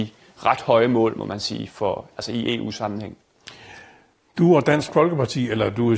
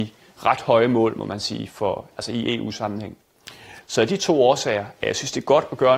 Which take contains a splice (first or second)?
second